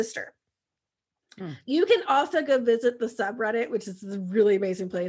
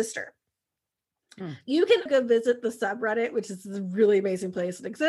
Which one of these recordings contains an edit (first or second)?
second